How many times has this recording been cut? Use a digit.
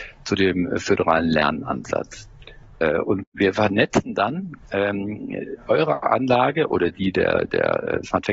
0